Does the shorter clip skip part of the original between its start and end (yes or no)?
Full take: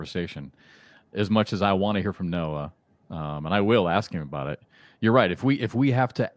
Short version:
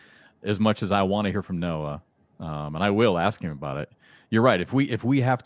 no